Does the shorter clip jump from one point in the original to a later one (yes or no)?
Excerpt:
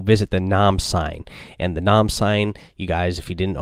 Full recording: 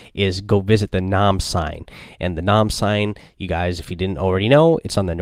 no